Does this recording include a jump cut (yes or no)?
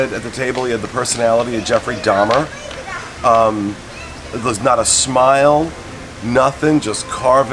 no